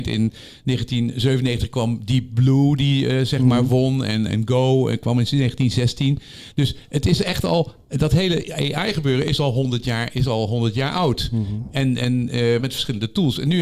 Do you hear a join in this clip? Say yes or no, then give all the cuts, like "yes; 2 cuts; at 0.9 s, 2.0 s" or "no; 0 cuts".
yes; 2 cuts; at 4.3 s, 12.6 s